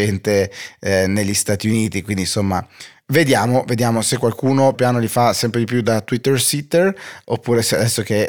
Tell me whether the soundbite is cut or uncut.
cut